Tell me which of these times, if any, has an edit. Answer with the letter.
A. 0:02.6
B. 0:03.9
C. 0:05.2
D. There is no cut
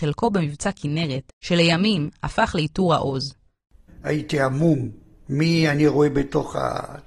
B